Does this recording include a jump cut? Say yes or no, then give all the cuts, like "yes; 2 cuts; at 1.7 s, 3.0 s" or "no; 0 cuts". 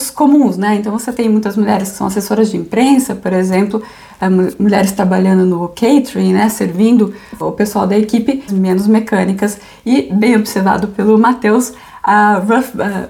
yes; 2 cuts; at 7.4 s, 8.5 s